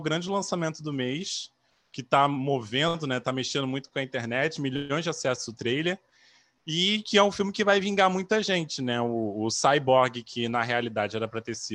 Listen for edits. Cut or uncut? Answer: uncut